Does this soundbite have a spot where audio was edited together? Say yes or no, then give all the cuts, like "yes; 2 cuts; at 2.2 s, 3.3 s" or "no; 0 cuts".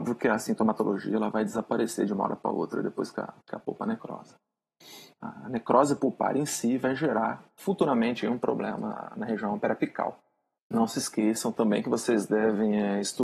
yes; 3 cuts; at 3.4 s, 5.2 s, 10.6 s